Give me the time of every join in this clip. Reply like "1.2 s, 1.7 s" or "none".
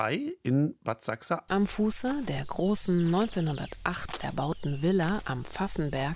1.5 s